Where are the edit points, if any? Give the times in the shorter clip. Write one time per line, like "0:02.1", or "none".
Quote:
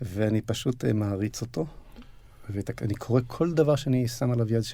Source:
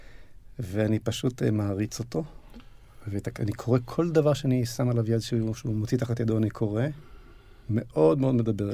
none